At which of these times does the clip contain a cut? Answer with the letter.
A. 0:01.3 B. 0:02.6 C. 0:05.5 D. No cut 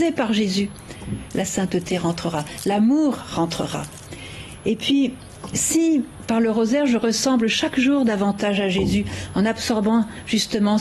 A